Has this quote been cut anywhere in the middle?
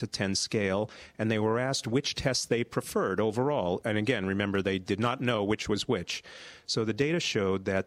no; 0 cuts

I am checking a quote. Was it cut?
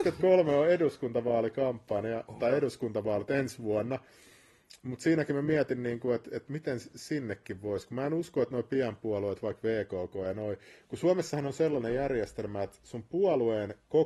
no; 0 cuts

